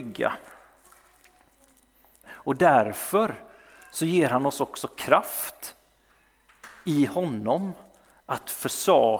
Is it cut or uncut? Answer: cut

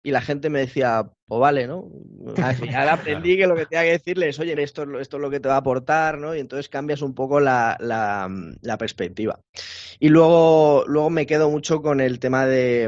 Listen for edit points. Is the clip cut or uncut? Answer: cut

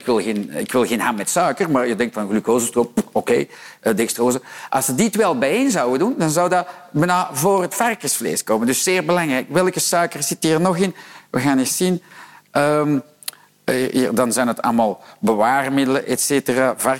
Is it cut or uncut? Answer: uncut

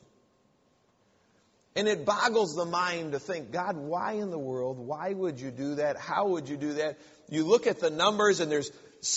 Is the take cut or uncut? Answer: uncut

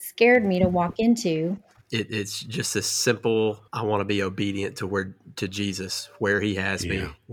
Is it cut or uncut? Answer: cut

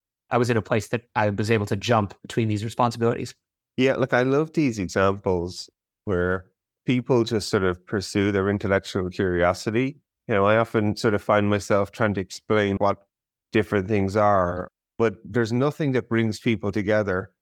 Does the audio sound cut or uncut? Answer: cut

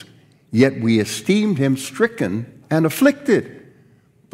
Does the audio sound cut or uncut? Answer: cut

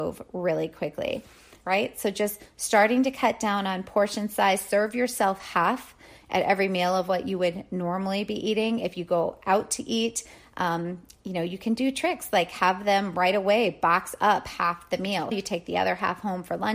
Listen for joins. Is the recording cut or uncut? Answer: cut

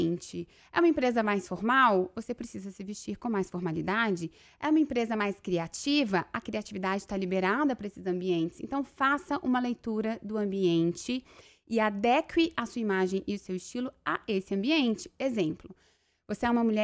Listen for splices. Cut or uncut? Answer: uncut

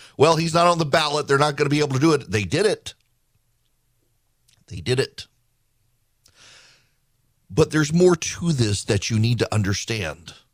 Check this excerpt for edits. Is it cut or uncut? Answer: uncut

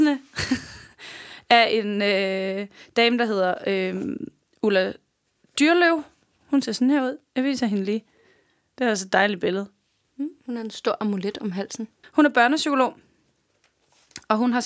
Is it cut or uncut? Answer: cut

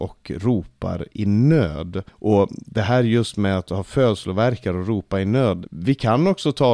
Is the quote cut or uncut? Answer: cut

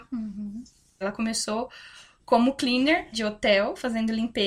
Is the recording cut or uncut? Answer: cut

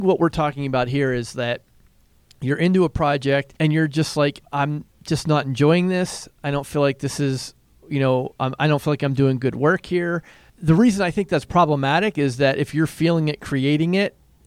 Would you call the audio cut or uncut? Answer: uncut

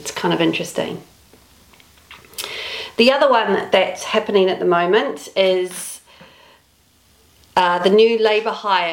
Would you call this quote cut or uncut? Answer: uncut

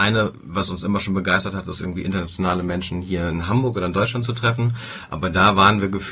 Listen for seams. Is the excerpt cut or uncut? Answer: uncut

